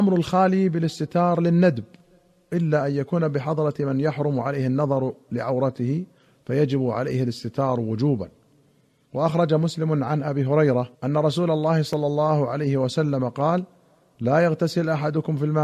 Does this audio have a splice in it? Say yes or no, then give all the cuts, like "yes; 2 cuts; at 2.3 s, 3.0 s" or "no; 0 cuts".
yes; 1 cut; at 10.9 s